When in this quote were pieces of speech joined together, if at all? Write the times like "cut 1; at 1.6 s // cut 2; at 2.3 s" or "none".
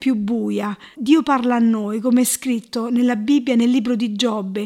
cut 1; at 0.9 s